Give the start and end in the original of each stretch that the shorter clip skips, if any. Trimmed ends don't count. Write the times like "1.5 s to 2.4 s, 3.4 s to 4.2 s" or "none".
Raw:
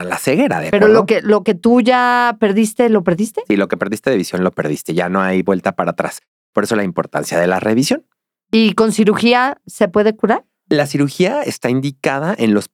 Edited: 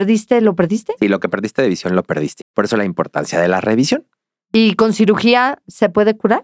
4.9 s to 6.4 s